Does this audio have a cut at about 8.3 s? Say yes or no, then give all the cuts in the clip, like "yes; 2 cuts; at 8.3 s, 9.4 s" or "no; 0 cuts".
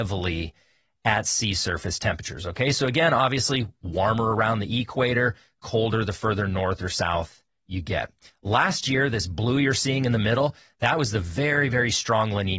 yes; 1 cut; at 8.3 s